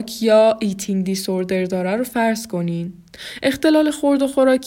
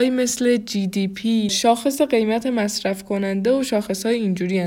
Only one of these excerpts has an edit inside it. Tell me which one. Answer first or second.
second